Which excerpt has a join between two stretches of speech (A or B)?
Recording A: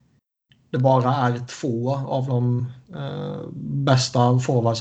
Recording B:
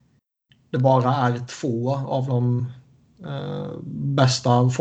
A